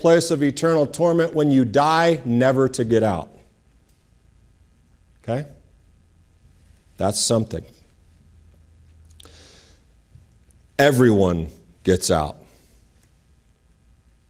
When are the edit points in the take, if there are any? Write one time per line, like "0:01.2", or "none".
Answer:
none